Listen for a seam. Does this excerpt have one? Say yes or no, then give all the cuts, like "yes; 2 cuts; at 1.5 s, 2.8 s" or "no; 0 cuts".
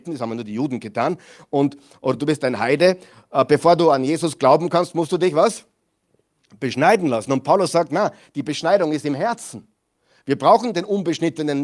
no; 0 cuts